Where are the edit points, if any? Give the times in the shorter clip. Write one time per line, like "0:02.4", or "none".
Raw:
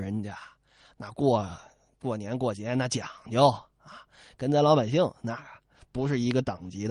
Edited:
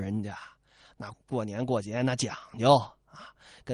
0:01.1